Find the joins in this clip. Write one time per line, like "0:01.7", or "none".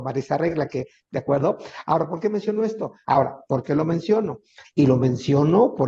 0:01.1
0:03.0
0:04.6